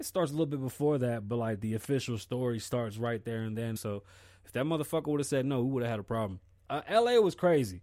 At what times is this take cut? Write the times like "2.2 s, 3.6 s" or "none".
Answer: 3.8 s